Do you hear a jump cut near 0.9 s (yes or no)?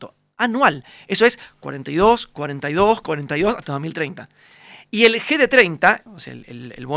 no